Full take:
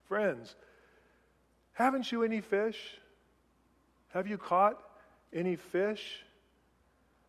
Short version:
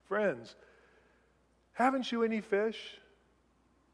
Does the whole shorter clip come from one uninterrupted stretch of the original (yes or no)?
yes